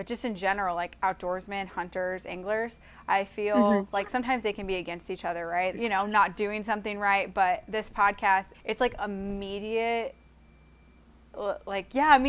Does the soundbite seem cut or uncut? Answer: cut